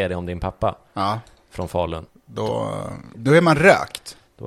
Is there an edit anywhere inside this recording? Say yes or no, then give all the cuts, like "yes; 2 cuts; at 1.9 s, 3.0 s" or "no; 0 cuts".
yes; 2 cuts; at 2.1 s, 3.1 s